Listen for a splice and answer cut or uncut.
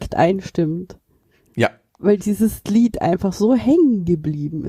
uncut